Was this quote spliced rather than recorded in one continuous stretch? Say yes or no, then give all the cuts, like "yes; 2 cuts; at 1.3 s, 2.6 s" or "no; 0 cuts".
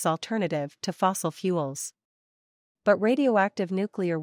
no; 0 cuts